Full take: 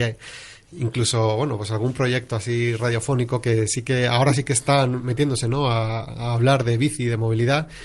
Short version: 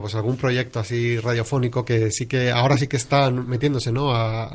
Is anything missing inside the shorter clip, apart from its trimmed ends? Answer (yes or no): no